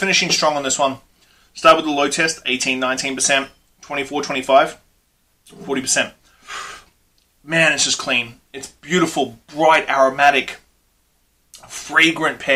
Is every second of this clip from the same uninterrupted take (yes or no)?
yes